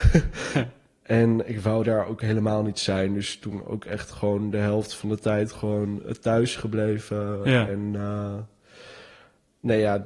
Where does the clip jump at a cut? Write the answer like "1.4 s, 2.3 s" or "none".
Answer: none